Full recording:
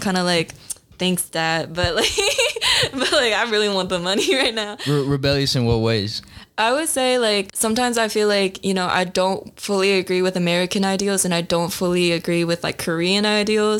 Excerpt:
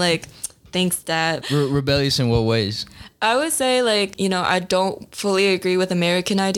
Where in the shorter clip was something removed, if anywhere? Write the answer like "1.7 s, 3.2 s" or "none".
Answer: 1.4 s, 4.1 s